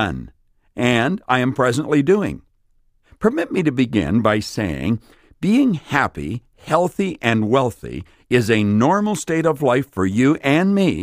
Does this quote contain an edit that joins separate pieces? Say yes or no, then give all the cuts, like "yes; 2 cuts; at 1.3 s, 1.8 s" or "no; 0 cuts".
no; 0 cuts